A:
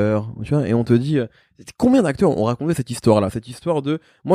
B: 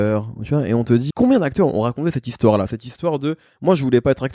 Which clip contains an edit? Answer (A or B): B